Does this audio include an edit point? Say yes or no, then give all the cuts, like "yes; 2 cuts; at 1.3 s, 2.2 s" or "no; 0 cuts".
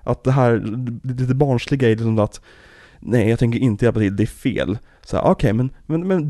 no; 0 cuts